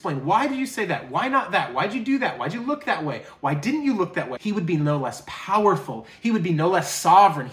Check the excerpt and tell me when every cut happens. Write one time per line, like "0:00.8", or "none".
0:04.4